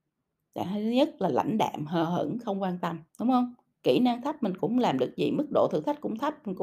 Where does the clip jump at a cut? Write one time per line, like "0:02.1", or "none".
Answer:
0:03.1